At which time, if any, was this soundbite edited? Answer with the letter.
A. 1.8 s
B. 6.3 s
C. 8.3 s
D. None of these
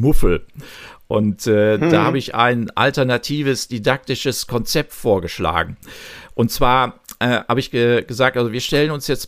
D